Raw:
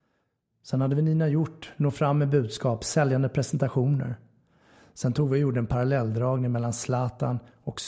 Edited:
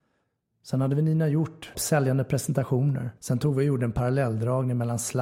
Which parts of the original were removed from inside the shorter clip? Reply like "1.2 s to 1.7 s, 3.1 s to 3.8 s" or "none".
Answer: 1.7 s to 2.8 s, 4.2 s to 4.9 s

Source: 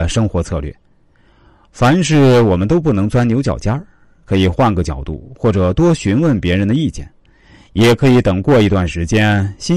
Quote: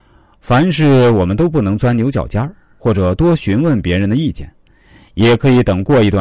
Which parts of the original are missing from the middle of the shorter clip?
4.1 s to 5.4 s

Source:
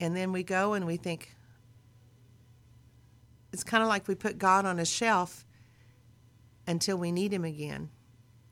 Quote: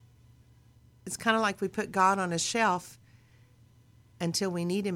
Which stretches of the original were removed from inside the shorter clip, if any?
none

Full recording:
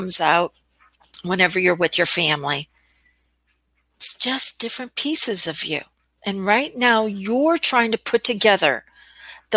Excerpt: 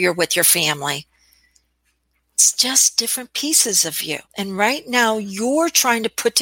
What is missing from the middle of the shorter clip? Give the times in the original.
5.9 s to 6.1 s

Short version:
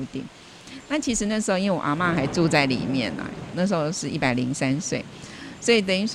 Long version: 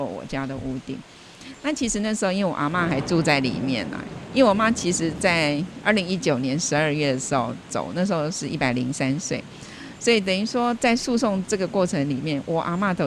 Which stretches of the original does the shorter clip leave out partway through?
4.3 s to 7.9 s

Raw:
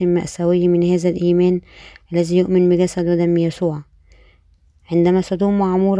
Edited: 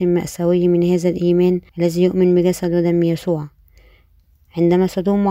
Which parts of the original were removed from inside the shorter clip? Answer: 1.7 s to 2.0 s

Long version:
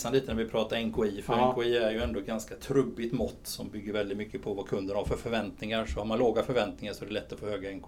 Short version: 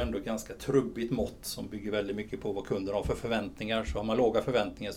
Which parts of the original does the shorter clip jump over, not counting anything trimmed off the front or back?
none

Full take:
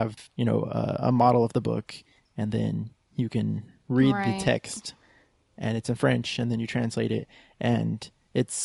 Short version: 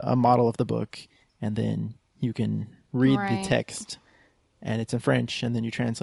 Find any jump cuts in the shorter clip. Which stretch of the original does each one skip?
none

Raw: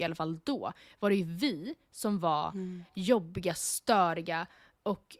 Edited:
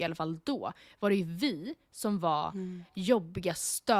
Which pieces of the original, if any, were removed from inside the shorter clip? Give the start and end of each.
none

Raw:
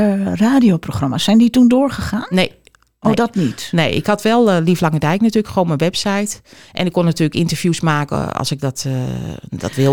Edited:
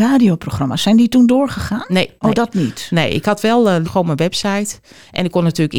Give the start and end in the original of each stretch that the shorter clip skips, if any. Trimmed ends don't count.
2.6 s to 3.0 s, 4.7 s to 5.5 s

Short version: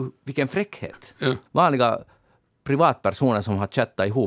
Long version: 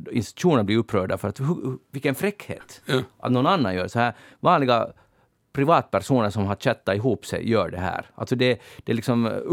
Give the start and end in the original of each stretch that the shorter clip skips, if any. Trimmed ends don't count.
3.1 s to 4.3 s

